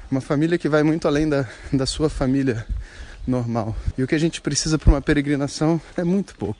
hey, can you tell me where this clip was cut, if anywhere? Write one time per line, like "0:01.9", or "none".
0:03.9